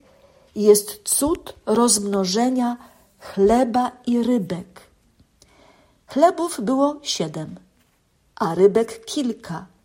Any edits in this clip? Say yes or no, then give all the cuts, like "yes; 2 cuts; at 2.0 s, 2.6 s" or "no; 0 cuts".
no; 0 cuts